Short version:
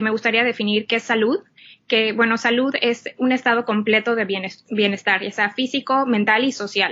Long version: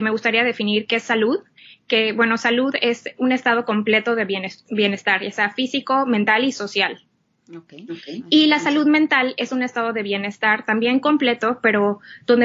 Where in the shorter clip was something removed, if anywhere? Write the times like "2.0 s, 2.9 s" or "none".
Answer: none